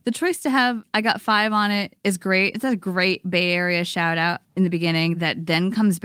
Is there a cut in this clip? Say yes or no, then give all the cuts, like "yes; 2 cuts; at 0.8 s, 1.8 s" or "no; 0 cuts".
no; 0 cuts